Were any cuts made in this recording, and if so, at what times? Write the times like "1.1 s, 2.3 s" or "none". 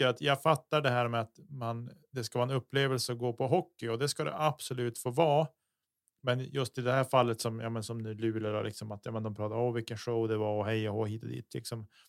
none